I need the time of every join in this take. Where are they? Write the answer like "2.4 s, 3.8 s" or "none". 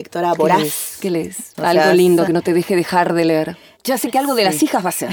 1.5 s, 3.8 s